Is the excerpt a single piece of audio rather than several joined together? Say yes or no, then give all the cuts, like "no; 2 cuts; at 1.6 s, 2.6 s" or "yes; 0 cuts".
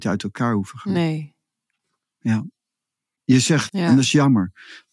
no; 1 cut; at 3.7 s